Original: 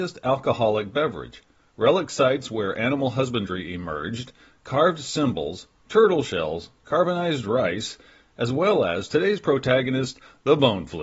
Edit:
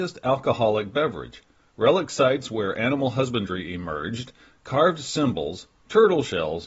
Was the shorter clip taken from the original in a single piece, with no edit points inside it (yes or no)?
yes